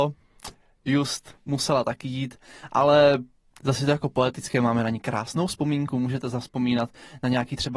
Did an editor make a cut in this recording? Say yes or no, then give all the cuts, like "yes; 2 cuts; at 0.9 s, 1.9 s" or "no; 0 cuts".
no; 0 cuts